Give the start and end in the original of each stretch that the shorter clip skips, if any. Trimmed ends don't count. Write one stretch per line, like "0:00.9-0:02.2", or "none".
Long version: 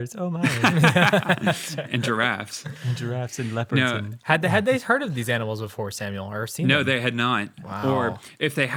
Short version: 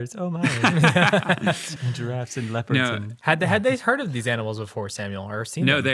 0:01.8-0:02.8